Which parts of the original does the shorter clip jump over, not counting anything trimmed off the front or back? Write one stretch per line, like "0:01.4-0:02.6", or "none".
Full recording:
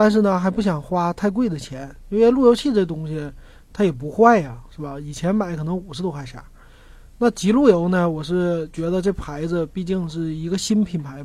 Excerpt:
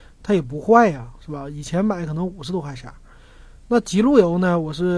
none